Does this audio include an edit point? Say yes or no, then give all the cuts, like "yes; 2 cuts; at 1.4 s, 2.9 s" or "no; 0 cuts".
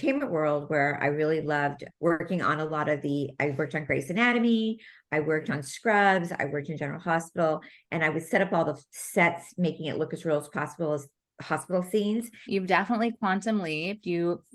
yes; 1 cut; at 12.5 s